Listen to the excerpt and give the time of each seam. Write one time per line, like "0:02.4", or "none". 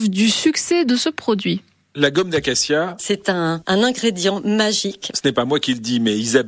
none